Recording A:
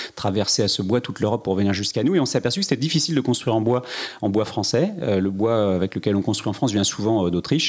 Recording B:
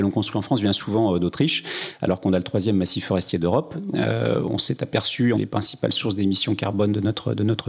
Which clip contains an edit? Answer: B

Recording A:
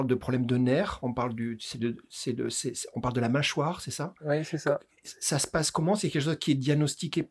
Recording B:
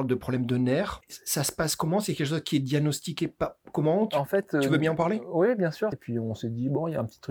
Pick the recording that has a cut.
B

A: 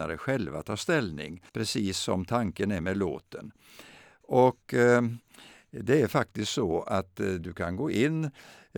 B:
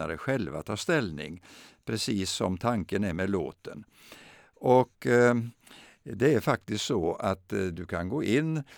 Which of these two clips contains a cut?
A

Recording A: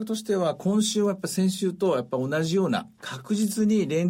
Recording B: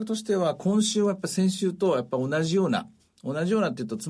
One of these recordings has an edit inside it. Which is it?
A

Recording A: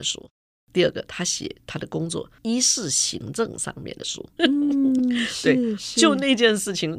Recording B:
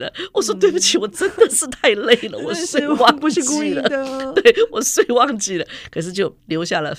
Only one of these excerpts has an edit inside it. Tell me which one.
A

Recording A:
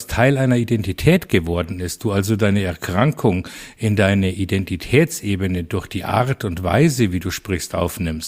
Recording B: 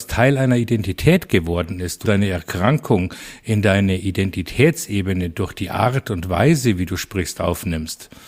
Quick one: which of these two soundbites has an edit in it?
B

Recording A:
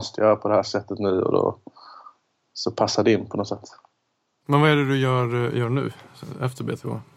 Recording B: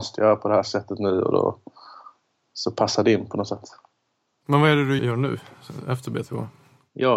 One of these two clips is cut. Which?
B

